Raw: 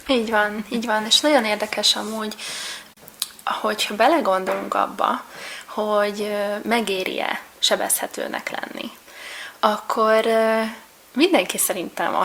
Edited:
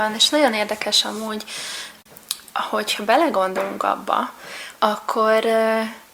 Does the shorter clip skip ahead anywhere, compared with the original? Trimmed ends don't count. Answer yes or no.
yes